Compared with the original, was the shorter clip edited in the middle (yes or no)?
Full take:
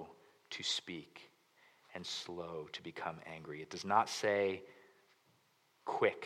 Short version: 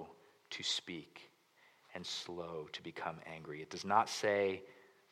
no